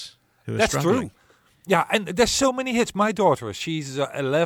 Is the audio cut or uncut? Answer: uncut